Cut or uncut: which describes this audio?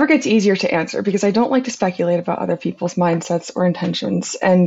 uncut